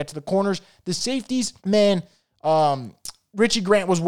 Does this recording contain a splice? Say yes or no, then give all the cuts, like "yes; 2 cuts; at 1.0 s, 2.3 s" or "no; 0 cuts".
yes; 1 cut; at 1.6 s